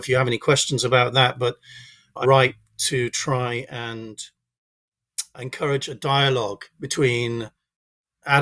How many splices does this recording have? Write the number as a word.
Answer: two